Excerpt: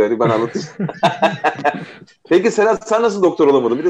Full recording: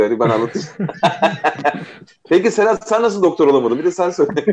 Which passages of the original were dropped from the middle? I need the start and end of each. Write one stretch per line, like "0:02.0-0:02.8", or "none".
none